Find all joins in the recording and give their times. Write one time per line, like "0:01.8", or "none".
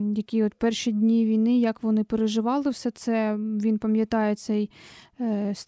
none